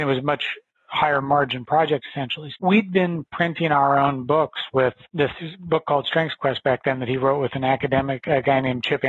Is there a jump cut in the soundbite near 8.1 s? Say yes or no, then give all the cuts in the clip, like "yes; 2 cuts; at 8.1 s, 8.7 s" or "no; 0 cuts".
no; 2 cuts; at 2.5 s, 5.0 s